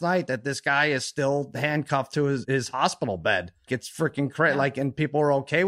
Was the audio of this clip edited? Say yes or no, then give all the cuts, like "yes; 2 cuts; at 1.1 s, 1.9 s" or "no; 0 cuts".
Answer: yes; 2 cuts; at 2.4 s, 3.7 s